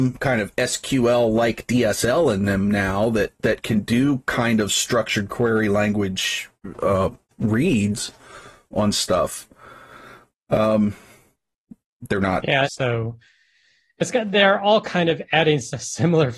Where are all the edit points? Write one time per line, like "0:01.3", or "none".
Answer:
0:12.6